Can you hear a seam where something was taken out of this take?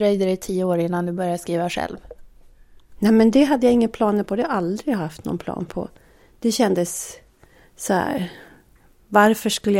no; 0 cuts

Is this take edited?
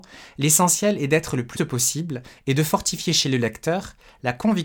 yes; 1 cut; at 1.6 s

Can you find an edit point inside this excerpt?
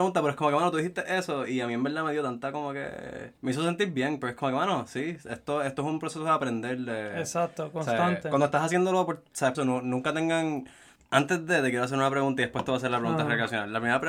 yes; 3 cuts; at 3.4 s, 9.5 s, 11.0 s

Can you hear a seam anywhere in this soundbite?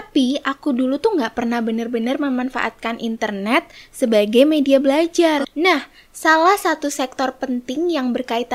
yes; 1 cut; at 5.4 s

